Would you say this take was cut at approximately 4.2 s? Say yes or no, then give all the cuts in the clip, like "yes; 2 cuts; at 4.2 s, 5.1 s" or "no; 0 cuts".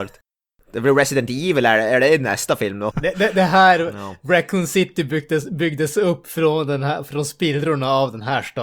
no; 1 cut; at 2.9 s